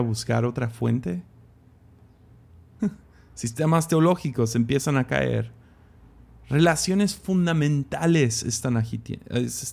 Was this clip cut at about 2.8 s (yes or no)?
yes